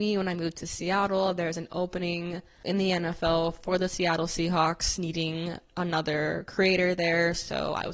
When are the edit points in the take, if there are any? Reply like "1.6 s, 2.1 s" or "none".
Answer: 2.6 s